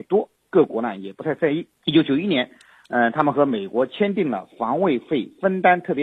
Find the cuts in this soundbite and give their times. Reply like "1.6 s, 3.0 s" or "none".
1.7 s